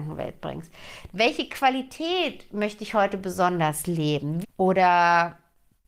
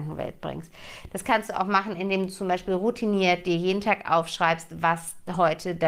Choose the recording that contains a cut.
first; 2 cuts; at 1.1 s, 4.4 s

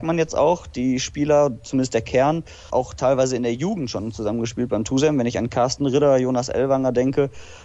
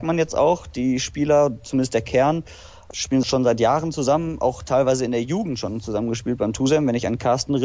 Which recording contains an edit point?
first; 1 cut; at 2.7 s

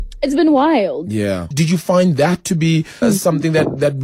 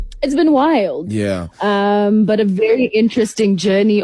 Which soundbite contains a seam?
first; 2 cuts; at 1.5 s, 3.0 s

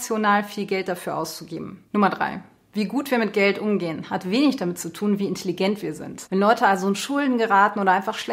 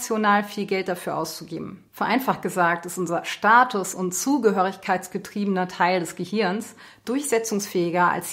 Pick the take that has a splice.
first; 2 cuts; at 1.9 s, 6.3 s

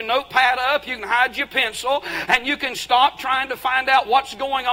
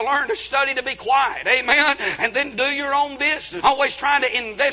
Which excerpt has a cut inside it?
second; 1 cut; at 3.6 s

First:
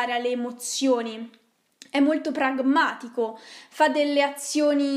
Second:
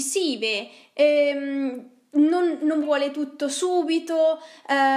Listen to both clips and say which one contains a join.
second; 1 cut; at 2.8 s

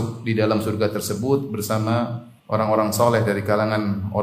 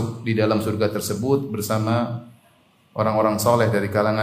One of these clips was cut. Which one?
first; 1 cut; at 2.4 s

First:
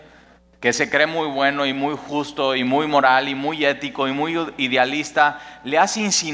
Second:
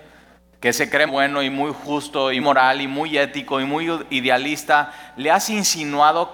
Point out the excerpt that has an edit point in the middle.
second; 2 cuts; at 1.1 s, 2.4 s

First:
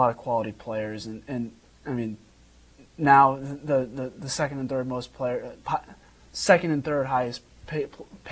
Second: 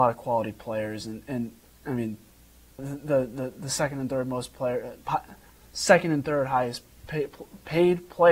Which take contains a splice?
second; 1 cut; at 2.8 s

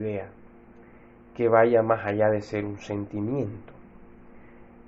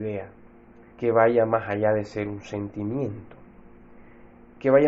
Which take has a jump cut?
second; 1 cut; at 0.9 s

